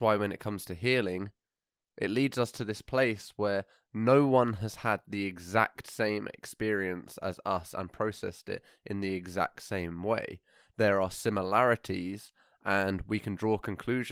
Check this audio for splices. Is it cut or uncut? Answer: uncut